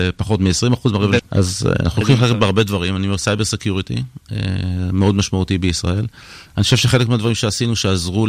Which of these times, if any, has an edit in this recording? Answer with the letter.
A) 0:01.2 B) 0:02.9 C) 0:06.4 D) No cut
A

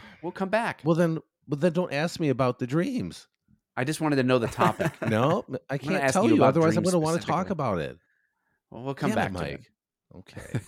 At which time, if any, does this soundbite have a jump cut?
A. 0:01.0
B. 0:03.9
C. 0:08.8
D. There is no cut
D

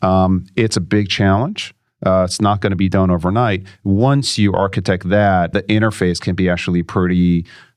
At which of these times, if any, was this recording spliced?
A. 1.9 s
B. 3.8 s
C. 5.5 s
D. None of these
C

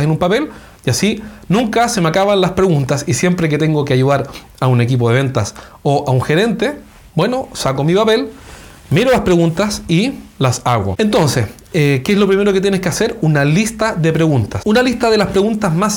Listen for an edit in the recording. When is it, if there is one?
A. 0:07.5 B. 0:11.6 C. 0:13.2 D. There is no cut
D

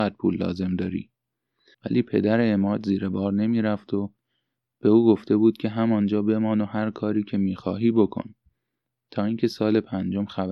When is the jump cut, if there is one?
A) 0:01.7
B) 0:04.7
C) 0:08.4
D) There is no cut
A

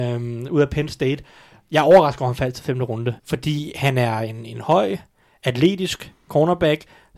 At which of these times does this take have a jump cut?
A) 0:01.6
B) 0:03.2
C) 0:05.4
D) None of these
B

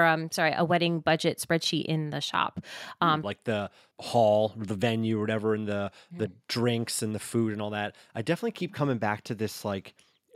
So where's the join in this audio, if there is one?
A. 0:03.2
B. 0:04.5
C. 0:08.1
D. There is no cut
A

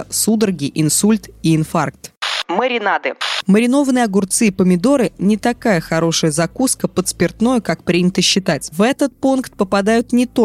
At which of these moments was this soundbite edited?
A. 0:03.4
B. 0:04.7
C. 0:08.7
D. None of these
C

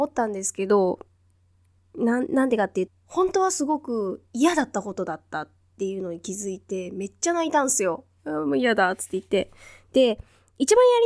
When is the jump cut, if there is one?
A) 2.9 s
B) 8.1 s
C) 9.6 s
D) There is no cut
A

